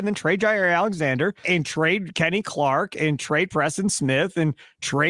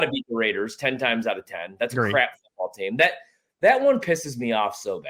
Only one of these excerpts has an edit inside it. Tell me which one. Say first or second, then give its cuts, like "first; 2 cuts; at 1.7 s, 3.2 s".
first; 1 cut; at 1.4 s